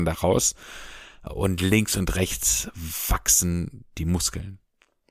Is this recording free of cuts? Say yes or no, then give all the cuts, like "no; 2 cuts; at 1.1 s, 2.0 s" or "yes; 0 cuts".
no; 1 cut; at 1.3 s